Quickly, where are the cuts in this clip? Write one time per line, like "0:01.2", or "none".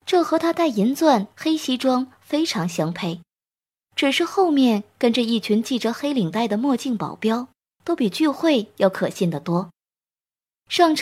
0:07.8